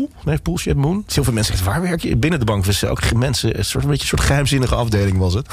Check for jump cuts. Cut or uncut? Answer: cut